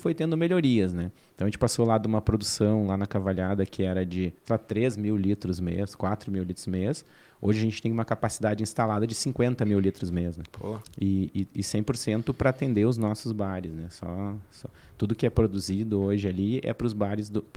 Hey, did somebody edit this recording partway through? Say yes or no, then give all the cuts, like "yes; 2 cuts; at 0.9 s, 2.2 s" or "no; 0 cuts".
yes; 1 cut; at 4.4 s